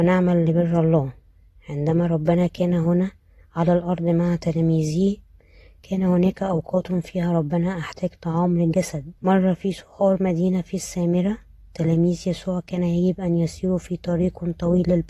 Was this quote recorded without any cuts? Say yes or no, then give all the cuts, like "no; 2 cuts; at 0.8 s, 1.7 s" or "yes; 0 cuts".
no; 1 cut; at 9.2 s